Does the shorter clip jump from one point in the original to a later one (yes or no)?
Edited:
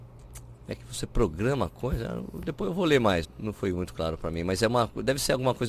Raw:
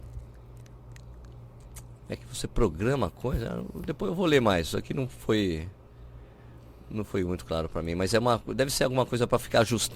yes